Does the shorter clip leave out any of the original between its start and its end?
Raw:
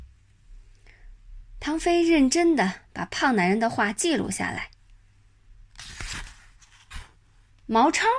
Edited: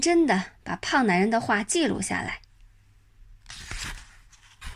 no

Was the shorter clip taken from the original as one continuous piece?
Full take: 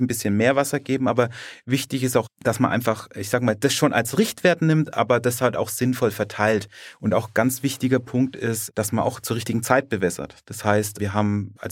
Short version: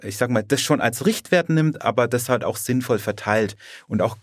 yes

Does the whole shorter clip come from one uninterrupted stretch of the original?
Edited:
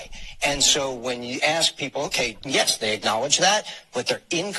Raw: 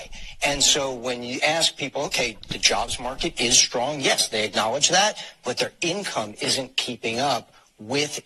no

